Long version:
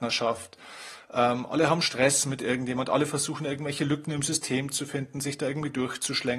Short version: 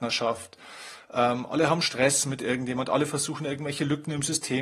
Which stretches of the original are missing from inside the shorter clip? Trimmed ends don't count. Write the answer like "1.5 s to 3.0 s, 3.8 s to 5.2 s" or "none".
none